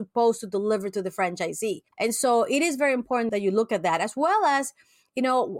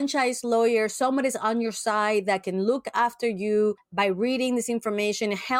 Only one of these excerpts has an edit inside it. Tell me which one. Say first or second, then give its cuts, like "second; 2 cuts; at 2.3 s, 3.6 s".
first; 1 cut; at 1.9 s